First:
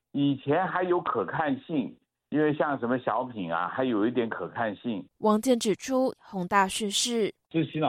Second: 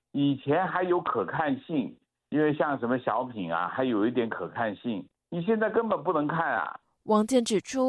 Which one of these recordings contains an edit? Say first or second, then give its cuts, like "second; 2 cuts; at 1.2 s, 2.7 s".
first; 2 cuts; at 5.1 s, 6.1 s